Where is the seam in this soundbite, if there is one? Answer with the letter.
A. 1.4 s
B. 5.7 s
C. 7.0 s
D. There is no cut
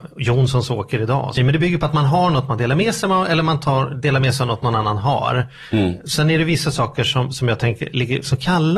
A